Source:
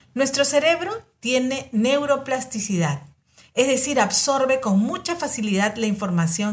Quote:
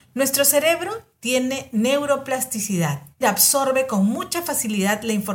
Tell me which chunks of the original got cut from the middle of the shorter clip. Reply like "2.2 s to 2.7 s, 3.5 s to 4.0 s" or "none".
3.2 s to 3.9 s